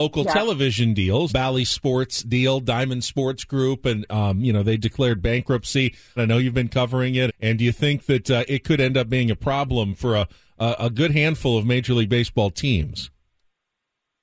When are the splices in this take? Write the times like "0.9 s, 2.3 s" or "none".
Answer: 1.3 s, 6.2 s, 7.3 s